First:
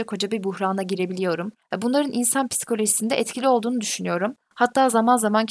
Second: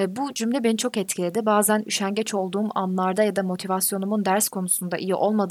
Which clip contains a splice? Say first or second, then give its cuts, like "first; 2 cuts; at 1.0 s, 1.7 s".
first; 1 cut; at 1.6 s